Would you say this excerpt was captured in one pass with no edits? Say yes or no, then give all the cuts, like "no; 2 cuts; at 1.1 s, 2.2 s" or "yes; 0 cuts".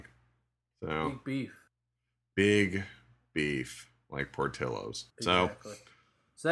no; 1 cut; at 5.1 s